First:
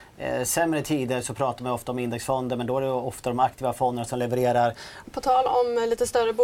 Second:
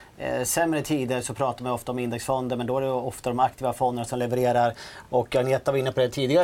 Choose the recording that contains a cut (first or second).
first